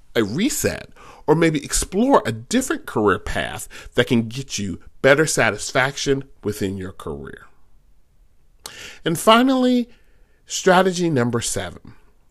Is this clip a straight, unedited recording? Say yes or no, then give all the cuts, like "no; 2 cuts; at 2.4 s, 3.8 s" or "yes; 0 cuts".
yes; 0 cuts